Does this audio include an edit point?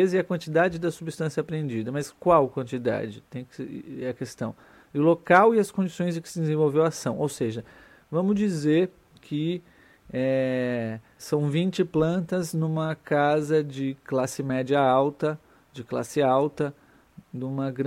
yes; 1 cut; at 11.2 s

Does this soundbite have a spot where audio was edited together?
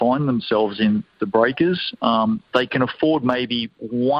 no; 0 cuts

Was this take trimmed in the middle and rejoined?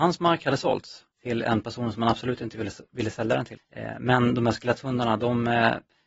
yes; 2 cuts; at 1.1 s, 3.6 s

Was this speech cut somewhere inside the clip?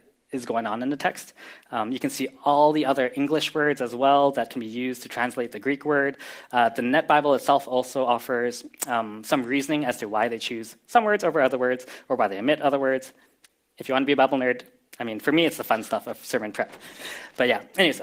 no; 0 cuts

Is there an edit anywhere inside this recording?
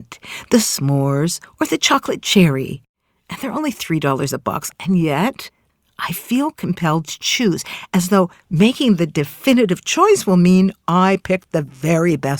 yes; 1 cut; at 4.7 s

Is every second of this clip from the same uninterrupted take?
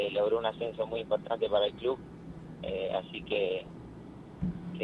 yes; 0 cuts

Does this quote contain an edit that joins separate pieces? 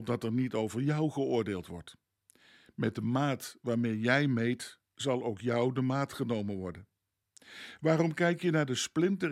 no; 0 cuts

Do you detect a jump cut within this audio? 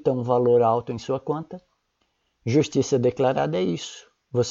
no; 0 cuts

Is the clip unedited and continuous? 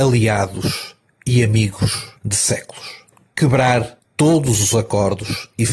no; 1 cut; at 2.2 s

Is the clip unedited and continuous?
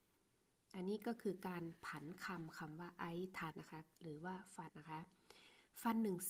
no; 2 cuts; at 3.5 s, 4.7 s

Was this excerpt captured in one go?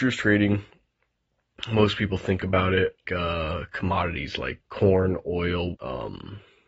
no; 3 cuts; at 3.0 s, 4.6 s, 5.7 s

